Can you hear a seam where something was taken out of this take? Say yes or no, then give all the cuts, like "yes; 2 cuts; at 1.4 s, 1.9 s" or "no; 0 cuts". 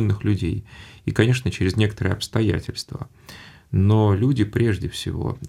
no; 0 cuts